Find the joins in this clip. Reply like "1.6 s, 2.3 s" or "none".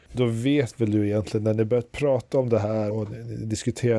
2.9 s